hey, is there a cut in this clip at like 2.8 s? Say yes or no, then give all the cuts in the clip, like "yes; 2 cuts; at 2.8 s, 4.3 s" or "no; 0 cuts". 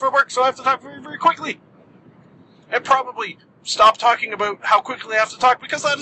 no; 0 cuts